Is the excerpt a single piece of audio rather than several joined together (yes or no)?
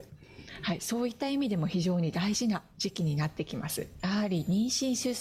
no